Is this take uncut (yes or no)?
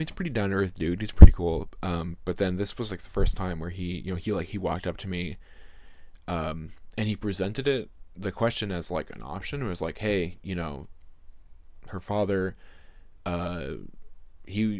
yes